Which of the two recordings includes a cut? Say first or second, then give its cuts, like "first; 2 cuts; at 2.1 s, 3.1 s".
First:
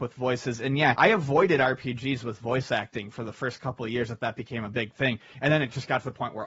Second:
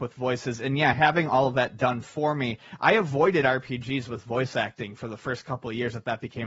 first; 1 cut; at 0.9 s